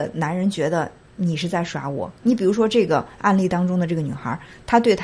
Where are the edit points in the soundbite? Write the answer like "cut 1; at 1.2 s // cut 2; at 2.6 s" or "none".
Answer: cut 1; at 2.2 s